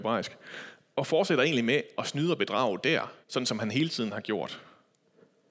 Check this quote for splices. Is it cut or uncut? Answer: cut